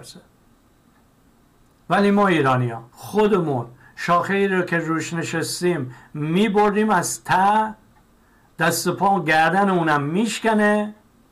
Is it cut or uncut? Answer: cut